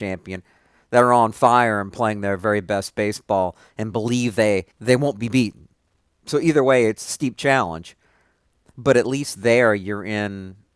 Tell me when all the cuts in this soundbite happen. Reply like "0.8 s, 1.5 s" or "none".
4.7 s